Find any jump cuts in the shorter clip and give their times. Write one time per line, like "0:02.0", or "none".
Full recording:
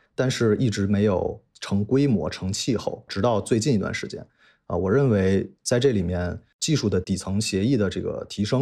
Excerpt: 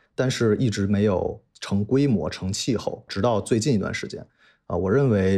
none